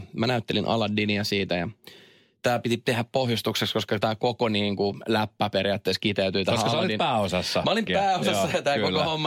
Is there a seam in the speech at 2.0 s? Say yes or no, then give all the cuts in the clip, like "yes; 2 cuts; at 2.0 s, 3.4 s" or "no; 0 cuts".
no; 1 cut; at 7.9 s